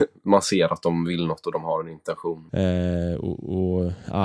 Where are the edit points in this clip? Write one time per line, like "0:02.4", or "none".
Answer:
0:02.5